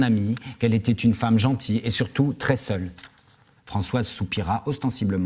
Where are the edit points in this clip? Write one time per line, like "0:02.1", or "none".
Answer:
0:03.6